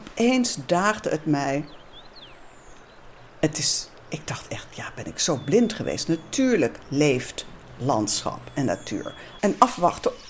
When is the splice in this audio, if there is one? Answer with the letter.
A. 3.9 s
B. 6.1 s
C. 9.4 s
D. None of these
C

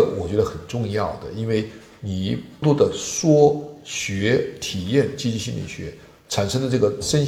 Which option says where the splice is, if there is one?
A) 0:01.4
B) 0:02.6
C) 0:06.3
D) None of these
B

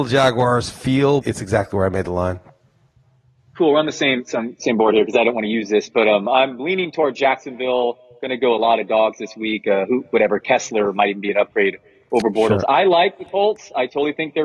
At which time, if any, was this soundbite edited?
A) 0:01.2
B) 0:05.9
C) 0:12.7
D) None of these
A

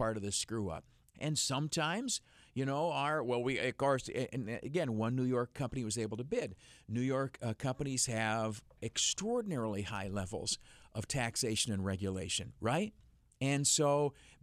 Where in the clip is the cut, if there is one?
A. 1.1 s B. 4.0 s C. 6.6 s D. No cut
A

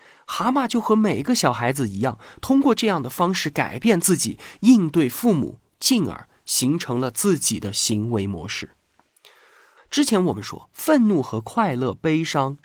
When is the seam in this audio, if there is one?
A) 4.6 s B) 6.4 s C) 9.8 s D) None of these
C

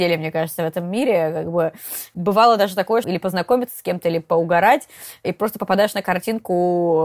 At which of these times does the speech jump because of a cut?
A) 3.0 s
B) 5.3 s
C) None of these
A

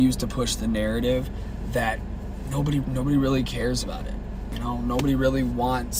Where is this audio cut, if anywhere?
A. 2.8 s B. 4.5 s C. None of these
A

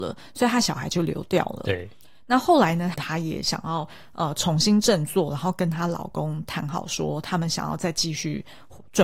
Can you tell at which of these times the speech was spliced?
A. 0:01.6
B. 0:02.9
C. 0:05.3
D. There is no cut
B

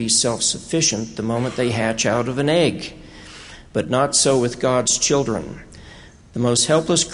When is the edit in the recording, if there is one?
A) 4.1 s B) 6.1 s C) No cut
C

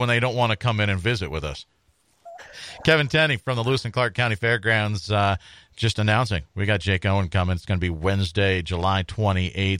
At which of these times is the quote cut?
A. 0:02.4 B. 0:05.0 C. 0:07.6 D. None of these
A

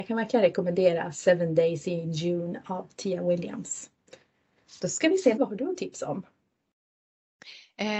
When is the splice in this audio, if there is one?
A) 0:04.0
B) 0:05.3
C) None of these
B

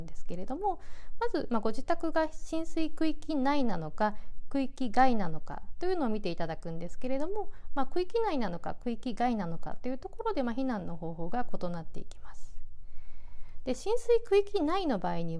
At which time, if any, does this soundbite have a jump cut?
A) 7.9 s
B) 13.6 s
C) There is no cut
C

